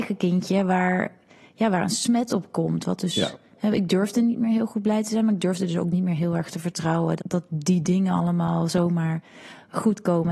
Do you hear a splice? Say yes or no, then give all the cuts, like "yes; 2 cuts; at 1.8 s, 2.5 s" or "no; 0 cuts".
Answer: yes; 1 cut; at 7.2 s